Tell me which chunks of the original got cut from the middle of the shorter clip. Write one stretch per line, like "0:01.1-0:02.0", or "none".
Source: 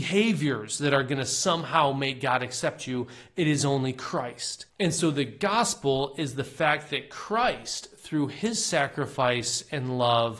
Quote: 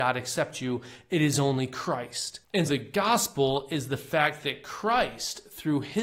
0:04.9-0:05.1